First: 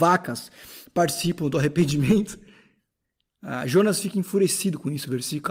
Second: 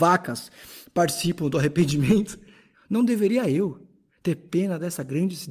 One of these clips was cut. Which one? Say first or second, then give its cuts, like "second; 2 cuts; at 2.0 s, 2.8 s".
second; 1 cut; at 2.7 s